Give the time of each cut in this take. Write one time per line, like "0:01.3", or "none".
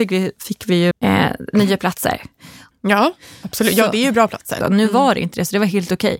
0:00.9
0:02.7
0:04.6

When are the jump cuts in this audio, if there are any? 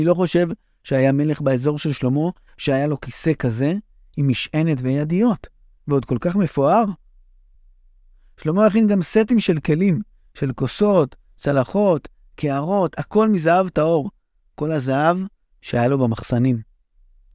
none

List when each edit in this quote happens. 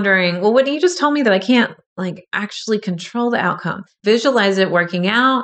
0:04.0

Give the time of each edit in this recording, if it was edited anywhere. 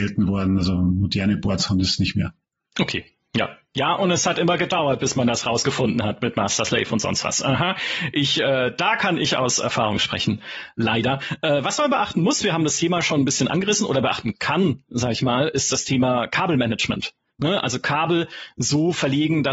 none

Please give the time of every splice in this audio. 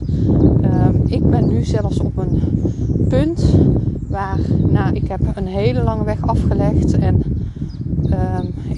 0:04.9

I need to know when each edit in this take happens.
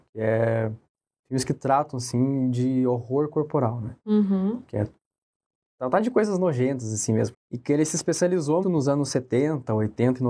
0:07.3
0:08.6

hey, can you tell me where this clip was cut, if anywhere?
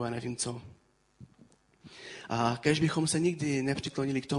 none

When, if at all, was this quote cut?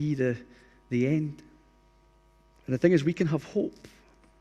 0:02.5

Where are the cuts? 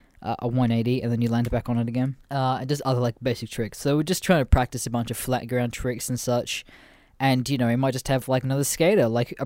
0:02.2

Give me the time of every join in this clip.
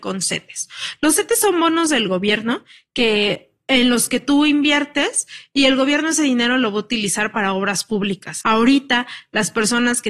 0:08.4

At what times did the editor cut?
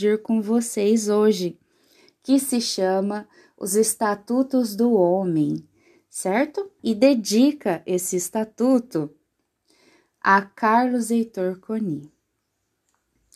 0:06.8

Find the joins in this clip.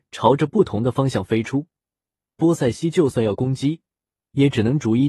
none

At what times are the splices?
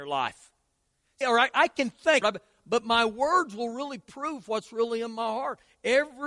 0:01.2
0:02.2

